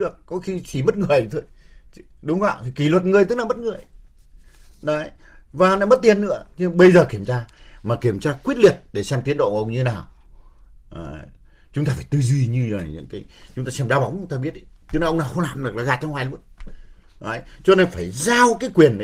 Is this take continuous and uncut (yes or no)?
yes